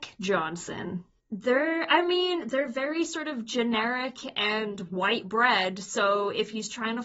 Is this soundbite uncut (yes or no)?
no